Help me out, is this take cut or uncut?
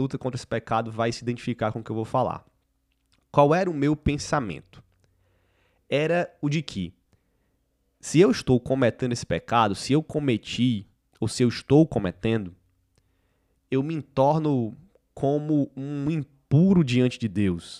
uncut